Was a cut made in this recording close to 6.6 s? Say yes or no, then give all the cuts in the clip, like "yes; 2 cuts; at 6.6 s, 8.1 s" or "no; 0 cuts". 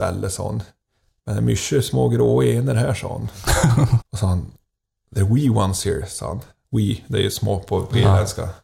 yes; 2 cuts; at 4.0 s, 6.6 s